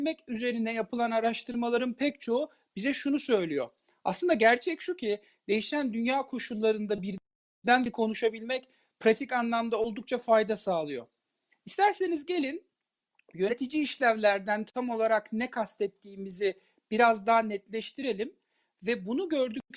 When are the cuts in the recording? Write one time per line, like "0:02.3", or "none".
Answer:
0:11.5